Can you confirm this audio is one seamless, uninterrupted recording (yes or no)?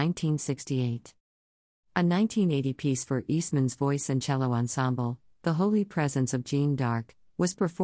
yes